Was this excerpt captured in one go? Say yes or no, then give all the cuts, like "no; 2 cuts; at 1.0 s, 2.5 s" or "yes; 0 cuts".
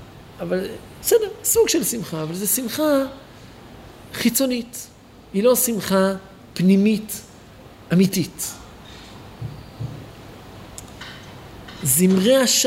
yes; 0 cuts